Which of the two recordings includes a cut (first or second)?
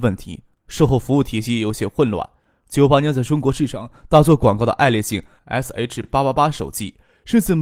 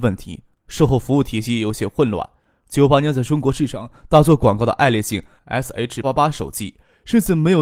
second